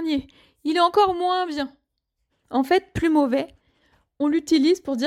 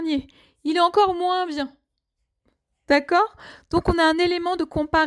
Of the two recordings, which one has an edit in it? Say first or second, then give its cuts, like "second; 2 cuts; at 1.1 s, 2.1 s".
first; 1 cut; at 2.3 s